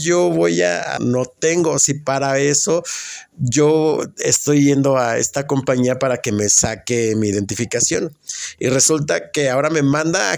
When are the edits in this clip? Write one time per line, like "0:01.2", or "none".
0:01.0

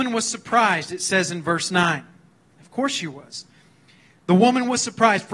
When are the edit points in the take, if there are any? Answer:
none

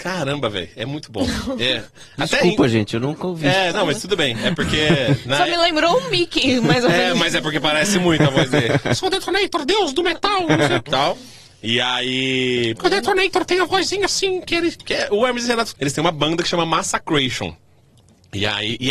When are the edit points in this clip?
0:10.9
0:12.7
0:15.7

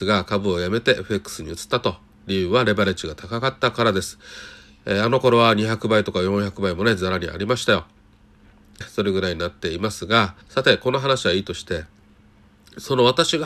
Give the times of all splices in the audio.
0:08.8
0:10.4

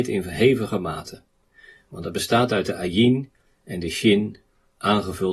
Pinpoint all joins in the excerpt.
none

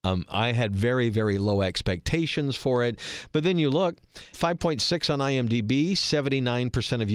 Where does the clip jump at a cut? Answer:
0:04.3

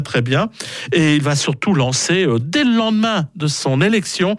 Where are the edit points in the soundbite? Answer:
none

